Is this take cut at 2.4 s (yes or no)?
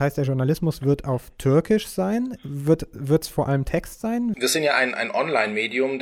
no